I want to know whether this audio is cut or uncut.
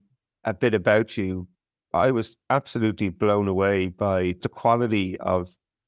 cut